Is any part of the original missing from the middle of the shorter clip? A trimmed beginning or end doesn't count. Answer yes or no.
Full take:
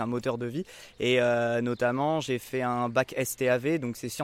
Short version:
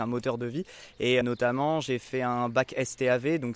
yes